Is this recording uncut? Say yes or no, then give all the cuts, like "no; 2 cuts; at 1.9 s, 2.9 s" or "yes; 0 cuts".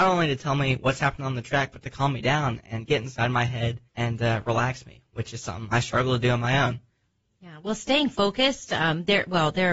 no; 1 cut; at 3.9 s